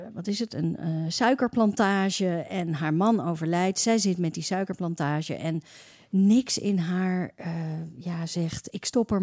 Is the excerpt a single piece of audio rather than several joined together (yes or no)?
yes